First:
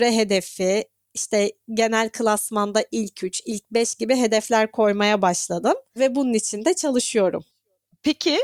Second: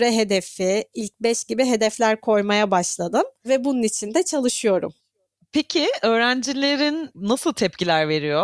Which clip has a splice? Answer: second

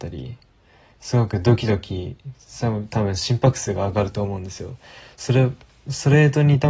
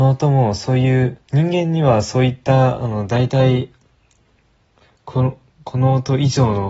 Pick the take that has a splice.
second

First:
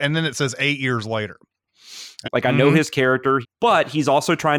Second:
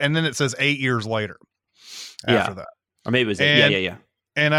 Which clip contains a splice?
first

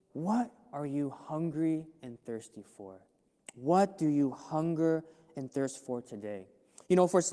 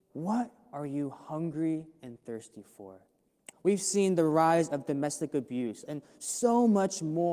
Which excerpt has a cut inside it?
second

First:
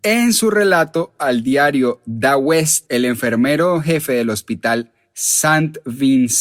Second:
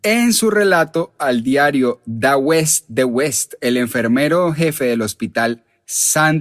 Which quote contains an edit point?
first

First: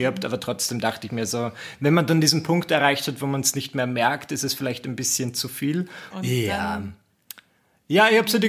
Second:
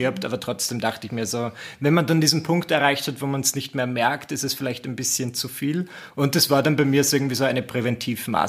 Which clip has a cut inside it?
first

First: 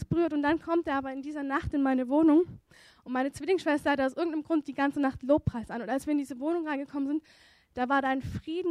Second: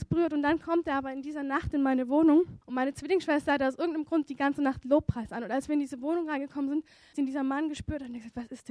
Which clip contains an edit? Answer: second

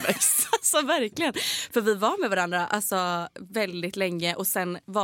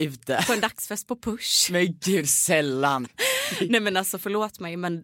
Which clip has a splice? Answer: second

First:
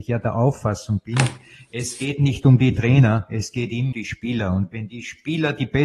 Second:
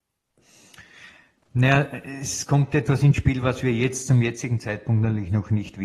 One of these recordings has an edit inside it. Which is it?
first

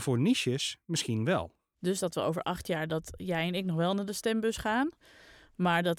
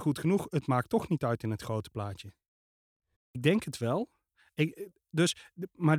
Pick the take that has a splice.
second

